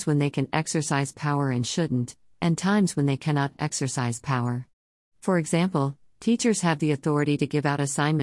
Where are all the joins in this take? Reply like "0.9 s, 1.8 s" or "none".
none